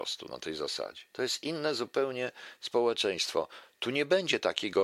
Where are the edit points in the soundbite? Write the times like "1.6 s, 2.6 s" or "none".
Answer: 1.1 s